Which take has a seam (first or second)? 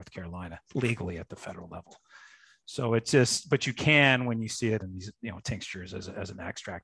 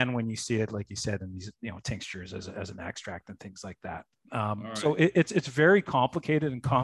first